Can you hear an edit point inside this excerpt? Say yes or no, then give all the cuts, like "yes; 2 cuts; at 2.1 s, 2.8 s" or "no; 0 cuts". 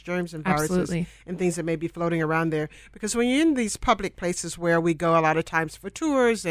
no; 0 cuts